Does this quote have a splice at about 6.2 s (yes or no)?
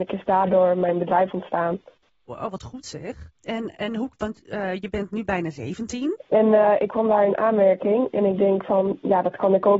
yes